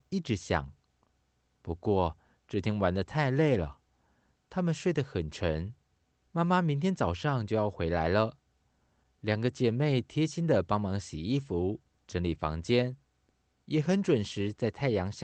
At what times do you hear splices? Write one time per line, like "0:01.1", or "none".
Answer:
0:06.3